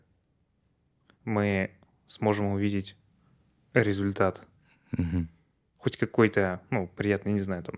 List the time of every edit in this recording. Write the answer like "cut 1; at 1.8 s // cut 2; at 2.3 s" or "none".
none